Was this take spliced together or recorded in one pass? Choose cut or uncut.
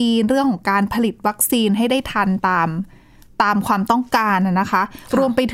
uncut